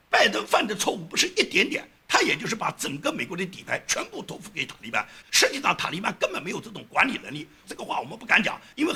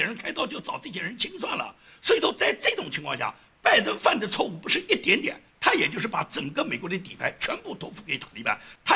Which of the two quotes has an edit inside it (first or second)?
first